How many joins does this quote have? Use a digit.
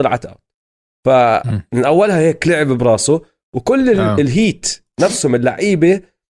0